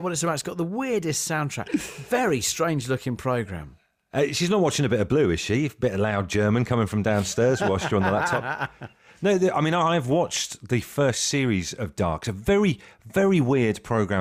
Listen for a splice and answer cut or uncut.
uncut